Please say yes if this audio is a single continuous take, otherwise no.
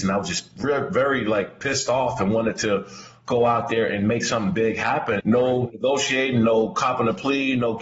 no